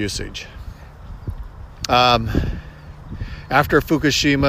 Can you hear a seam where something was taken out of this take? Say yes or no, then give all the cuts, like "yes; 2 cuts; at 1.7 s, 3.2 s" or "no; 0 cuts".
yes; 1 cut; at 1.9 s